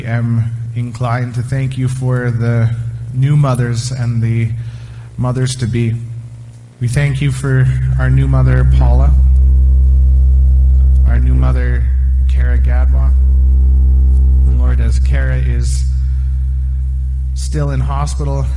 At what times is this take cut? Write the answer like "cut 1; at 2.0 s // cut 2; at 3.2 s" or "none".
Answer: cut 1; at 6.7 s